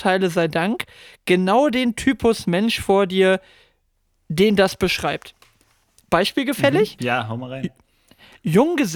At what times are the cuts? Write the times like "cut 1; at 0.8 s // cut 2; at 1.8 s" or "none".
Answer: cut 1; at 7.0 s